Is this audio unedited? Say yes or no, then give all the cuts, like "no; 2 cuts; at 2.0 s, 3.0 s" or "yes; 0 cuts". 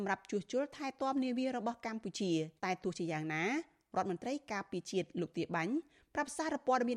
no; 1 cut; at 2.6 s